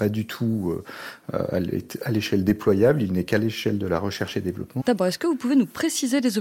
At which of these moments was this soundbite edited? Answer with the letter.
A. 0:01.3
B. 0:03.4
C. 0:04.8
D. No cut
C